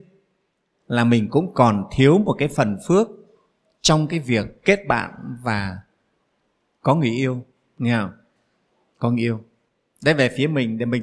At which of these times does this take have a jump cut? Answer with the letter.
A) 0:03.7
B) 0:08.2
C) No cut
C